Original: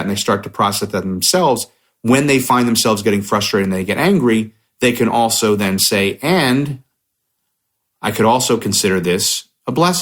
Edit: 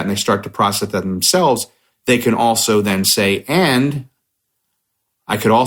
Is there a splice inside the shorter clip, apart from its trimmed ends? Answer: yes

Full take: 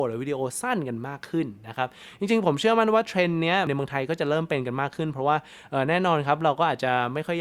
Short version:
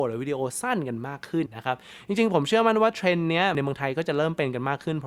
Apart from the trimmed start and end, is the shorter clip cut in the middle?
yes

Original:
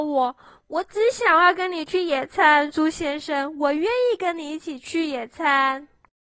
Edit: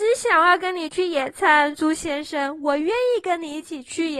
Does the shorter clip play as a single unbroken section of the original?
yes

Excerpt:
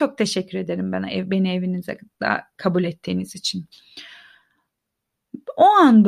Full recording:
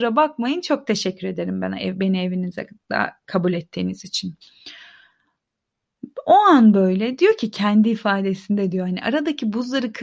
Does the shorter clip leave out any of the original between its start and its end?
no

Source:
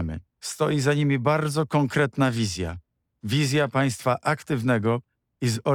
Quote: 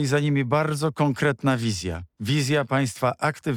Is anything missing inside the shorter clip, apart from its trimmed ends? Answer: yes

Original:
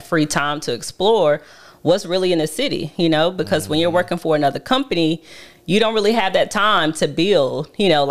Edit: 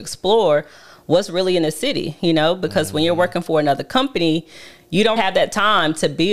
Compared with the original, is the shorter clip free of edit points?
no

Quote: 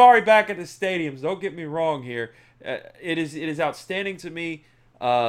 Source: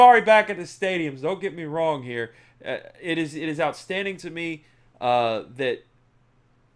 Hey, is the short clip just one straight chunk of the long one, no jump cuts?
yes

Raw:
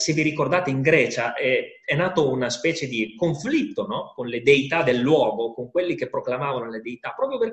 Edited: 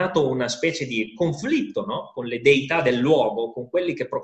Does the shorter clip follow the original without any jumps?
yes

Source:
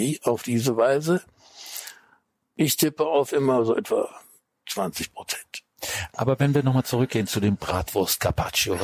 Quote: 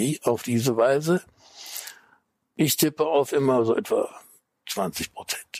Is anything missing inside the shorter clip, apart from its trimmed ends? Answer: no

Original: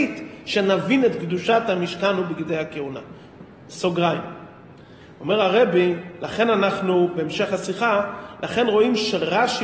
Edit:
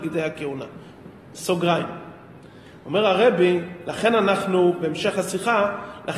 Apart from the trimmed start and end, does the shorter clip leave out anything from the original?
no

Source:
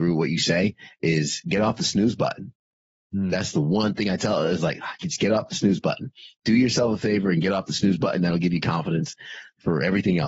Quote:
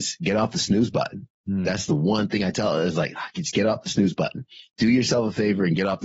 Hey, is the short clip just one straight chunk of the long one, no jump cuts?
no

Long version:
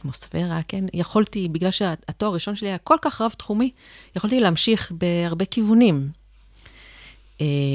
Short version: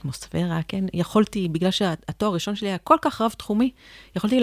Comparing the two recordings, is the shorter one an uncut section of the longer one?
yes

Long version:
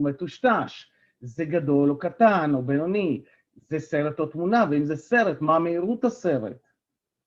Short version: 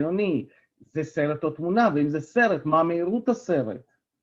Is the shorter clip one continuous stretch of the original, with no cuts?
yes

